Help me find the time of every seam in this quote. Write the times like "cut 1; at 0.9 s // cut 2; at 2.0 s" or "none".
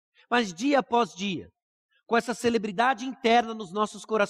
none